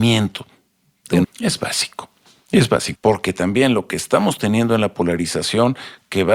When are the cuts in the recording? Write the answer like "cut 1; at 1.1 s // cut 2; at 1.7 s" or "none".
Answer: cut 1; at 1.2 s // cut 2; at 3.0 s